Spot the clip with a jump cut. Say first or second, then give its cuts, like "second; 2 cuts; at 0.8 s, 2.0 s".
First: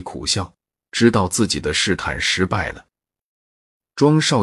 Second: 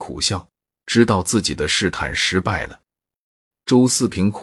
second; 1 cut; at 3.5 s